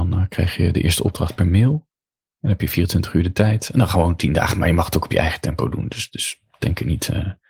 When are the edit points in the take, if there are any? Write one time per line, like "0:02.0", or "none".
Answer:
none